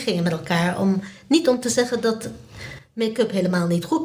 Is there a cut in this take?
no; 0 cuts

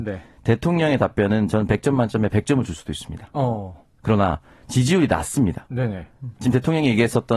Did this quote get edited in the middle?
no; 0 cuts

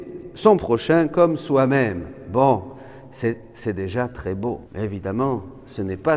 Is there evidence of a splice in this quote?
yes; 1 cut; at 4.7 s

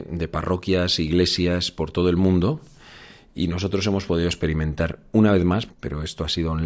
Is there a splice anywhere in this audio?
yes; 1 cut; at 5.7 s

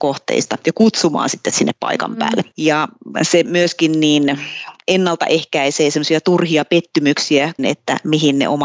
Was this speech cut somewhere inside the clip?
yes; 2 cuts; at 2.5 s, 7.6 s

